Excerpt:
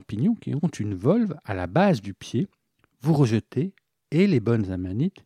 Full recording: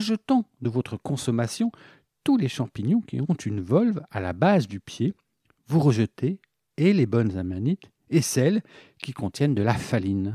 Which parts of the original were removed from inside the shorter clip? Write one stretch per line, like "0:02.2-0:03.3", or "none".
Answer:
none